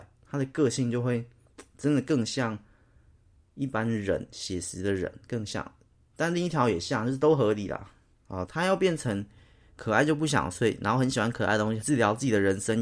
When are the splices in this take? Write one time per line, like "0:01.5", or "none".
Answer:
0:08.4
0:11.8